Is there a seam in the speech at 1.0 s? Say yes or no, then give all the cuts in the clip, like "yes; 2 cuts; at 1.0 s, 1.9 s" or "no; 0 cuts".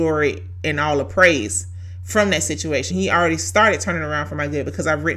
no; 1 cut; at 2.9 s